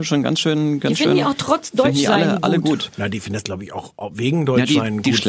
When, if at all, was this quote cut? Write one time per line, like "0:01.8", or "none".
none